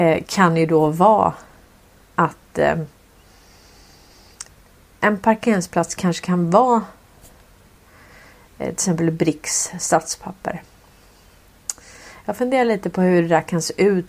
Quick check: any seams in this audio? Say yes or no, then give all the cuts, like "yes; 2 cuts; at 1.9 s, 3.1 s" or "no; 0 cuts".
no; 0 cuts